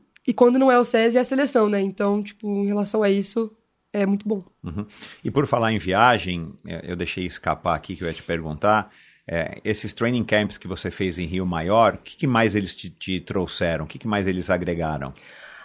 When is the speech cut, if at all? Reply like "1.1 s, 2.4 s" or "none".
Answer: none

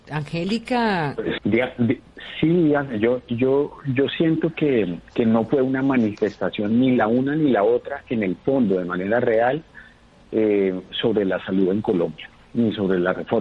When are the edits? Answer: 1.4 s

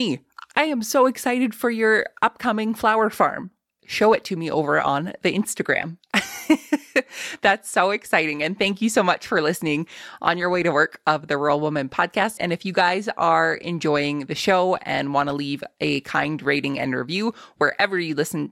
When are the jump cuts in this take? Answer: 3.8 s, 12.4 s

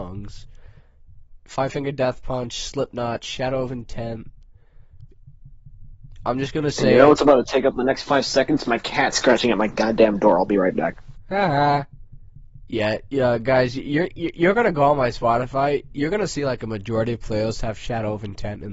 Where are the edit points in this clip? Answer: none

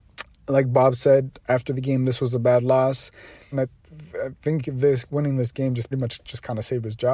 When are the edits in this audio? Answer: 3.5 s, 5.9 s

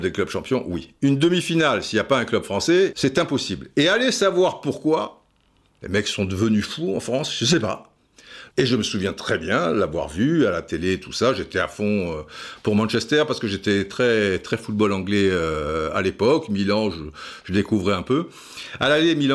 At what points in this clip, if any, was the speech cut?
2.9 s, 8.5 s

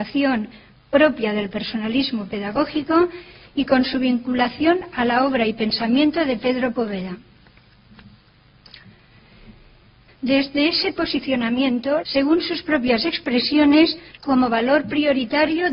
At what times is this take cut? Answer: 10.1 s, 12.0 s, 14.1 s

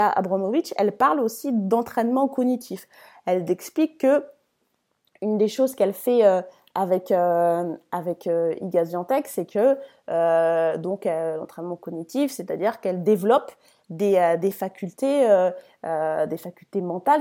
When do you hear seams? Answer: none

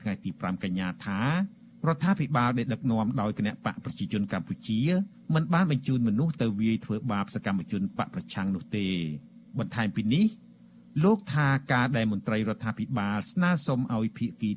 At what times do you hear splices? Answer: 9.5 s

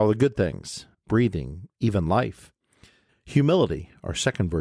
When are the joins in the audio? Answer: 0.9 s, 3.1 s

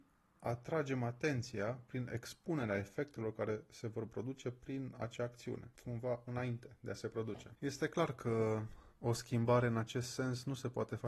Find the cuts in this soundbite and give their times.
none

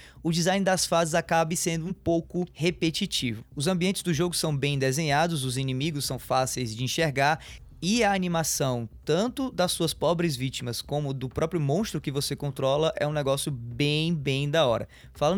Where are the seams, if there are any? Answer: 3.4 s

